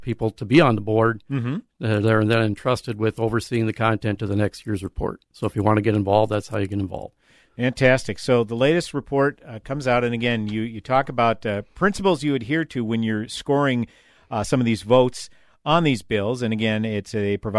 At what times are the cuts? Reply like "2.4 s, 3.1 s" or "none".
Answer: none